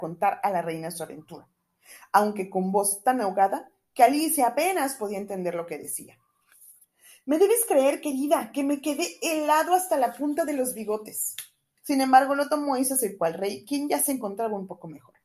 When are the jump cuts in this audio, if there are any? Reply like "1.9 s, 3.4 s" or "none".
11.8 s